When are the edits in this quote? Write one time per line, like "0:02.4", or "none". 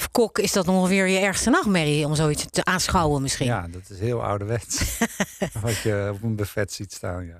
none